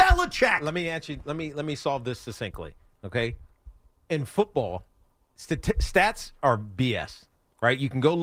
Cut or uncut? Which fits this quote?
uncut